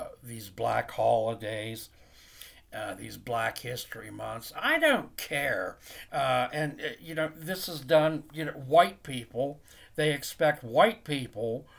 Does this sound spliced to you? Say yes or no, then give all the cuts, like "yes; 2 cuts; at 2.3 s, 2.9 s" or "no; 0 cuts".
yes; 1 cut; at 6.1 s